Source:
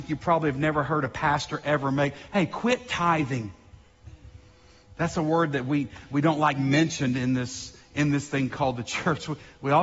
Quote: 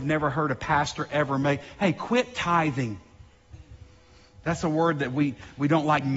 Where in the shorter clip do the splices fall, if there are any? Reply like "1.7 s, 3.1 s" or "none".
none